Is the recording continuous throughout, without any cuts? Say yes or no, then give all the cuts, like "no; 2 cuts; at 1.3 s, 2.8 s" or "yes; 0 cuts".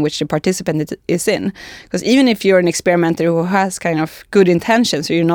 yes; 0 cuts